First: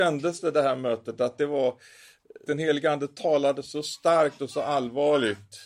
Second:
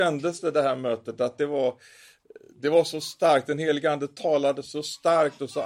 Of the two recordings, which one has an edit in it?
first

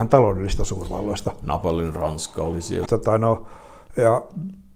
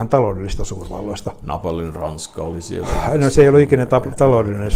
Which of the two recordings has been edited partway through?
first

